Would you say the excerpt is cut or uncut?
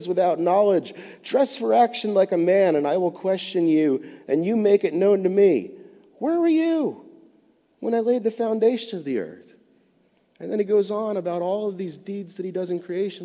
uncut